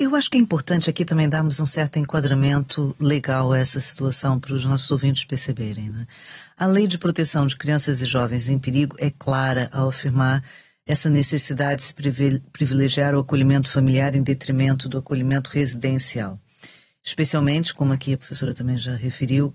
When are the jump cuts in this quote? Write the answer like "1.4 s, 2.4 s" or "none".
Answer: none